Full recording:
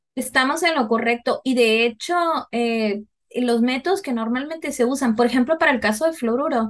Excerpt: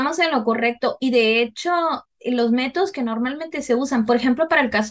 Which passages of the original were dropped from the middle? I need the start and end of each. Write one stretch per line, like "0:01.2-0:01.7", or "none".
0:02.5-0:03.2